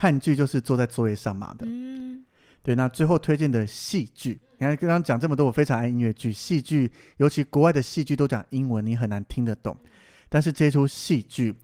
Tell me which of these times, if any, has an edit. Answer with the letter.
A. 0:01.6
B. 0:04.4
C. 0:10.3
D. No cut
A